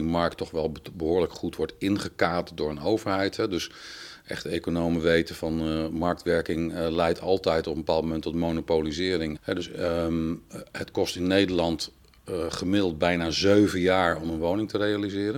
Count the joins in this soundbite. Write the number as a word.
one